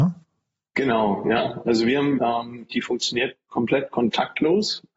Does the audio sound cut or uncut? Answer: cut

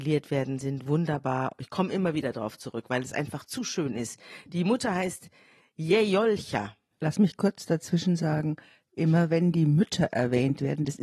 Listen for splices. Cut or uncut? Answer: uncut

